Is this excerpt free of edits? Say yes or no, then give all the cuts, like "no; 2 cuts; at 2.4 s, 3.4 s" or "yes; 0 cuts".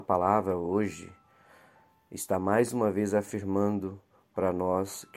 yes; 0 cuts